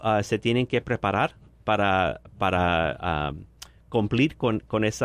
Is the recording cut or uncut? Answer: uncut